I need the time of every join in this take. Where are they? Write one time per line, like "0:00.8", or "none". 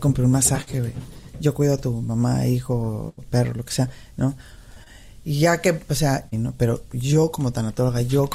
0:04.1
0:06.3